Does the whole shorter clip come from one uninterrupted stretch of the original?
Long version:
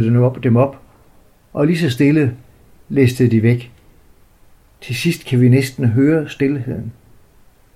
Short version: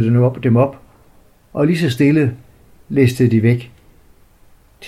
yes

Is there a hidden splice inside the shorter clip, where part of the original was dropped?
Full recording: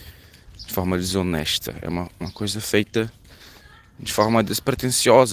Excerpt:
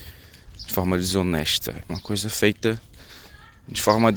yes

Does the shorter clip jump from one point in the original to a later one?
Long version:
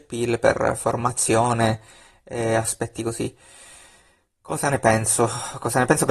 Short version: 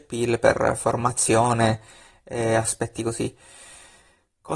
no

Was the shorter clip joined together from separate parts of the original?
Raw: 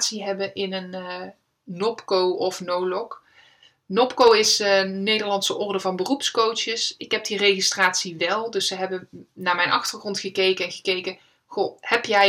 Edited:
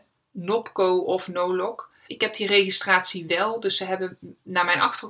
yes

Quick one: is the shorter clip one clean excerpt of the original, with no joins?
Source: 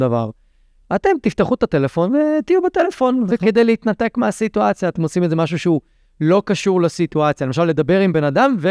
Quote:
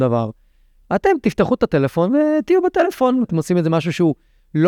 no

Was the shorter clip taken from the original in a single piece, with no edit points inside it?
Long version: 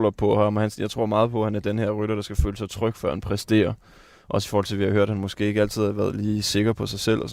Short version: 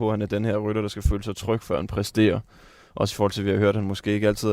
yes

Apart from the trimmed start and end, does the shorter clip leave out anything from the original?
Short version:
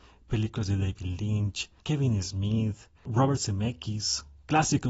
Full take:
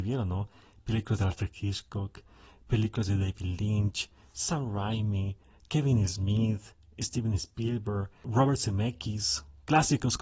yes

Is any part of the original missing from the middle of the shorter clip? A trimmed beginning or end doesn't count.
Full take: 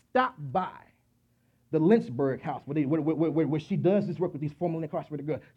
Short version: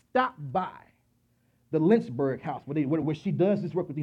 yes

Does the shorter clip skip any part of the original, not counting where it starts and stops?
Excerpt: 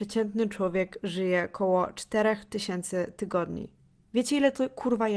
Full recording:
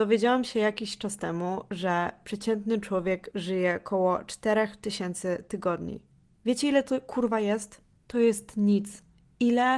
no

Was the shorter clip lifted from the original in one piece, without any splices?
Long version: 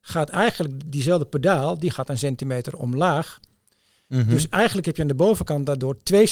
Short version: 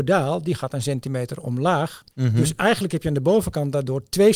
no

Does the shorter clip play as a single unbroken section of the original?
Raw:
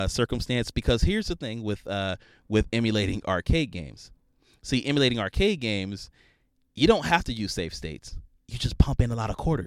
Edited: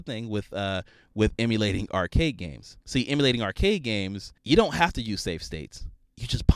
no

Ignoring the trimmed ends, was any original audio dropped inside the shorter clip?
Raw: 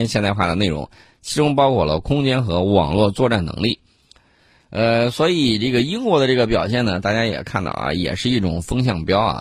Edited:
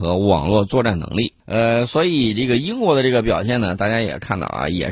yes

